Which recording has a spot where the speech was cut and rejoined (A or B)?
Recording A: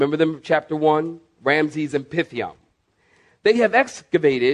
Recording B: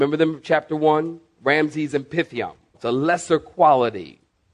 B